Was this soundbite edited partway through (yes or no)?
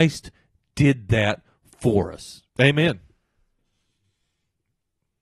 yes